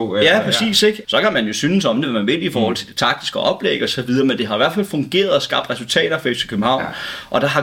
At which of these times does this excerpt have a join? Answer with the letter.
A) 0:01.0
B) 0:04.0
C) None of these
A